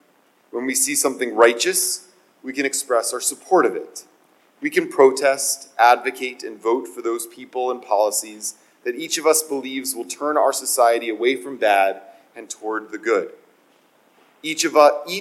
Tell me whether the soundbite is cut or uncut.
uncut